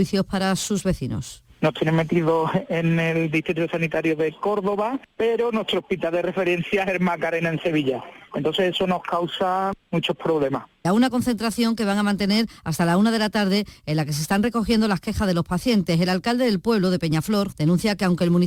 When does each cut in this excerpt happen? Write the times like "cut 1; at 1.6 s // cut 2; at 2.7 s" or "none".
cut 1; at 10.8 s // cut 2; at 17.5 s